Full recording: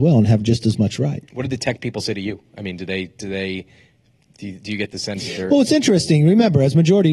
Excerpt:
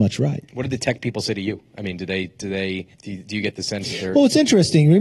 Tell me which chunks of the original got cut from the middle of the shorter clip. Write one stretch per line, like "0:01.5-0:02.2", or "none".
0:03.7-0:04.3